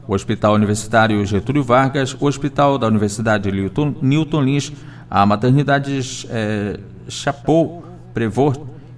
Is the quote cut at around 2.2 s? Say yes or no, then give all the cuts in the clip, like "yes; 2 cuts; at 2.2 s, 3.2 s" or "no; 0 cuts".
no; 0 cuts